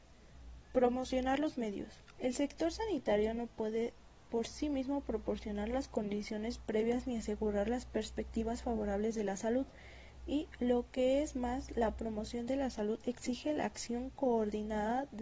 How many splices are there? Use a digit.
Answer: 1